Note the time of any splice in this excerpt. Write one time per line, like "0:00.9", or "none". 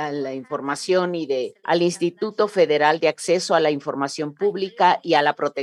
0:01.6